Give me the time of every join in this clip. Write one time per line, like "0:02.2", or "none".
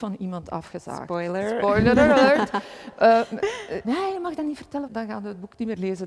0:03.8
0:04.9